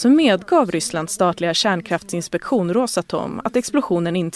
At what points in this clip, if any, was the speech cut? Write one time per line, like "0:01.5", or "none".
none